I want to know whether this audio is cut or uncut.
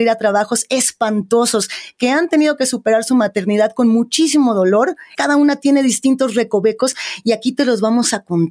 cut